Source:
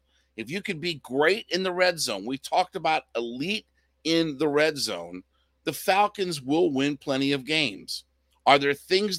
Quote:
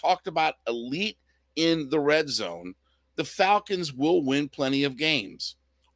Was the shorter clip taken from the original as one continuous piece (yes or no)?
yes